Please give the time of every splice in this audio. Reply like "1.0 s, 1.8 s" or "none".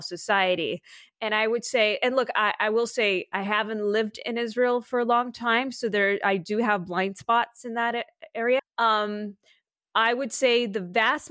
8.6 s

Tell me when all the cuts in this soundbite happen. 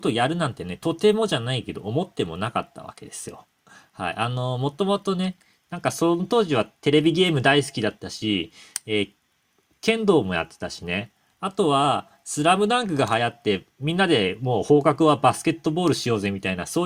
none

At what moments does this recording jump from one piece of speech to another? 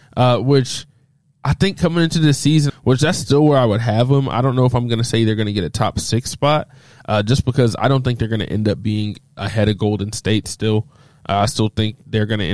2.7 s

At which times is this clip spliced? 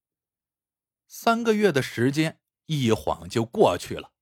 none

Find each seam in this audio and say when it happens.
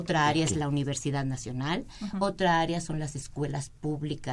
none

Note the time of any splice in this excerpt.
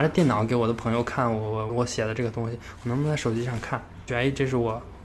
1.7 s, 4.1 s

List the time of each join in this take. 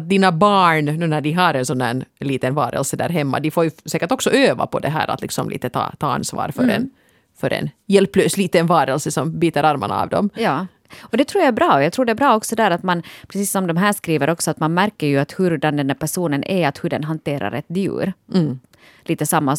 none

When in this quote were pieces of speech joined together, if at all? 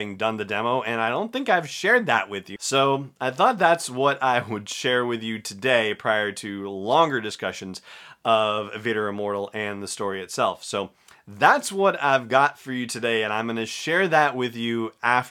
2.6 s

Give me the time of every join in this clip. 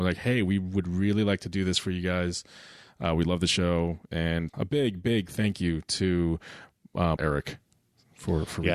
4.5 s, 7.2 s

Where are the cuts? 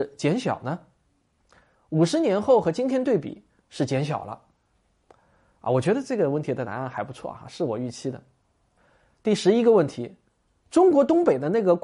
1.7 s

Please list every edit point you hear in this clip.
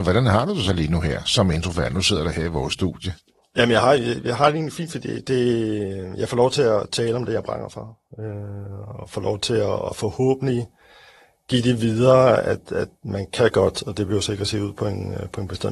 none

